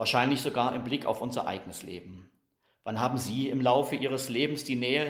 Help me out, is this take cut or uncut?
uncut